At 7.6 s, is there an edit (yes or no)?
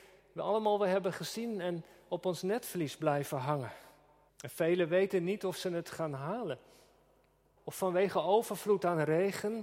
yes